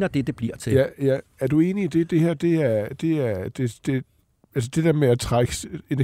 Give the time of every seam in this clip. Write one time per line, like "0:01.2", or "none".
none